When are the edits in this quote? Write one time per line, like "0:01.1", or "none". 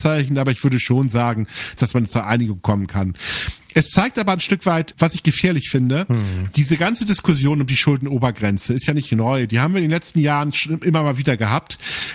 0:01.8